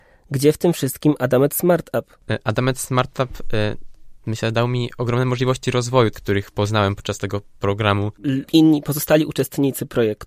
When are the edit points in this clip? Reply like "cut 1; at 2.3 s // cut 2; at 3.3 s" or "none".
cut 1; at 6.1 s // cut 2; at 8.5 s